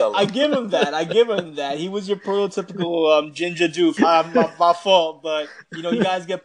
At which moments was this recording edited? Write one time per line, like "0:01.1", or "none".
0:04.0